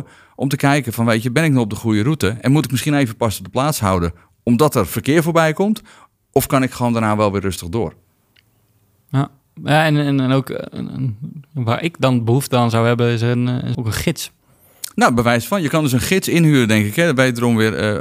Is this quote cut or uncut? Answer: cut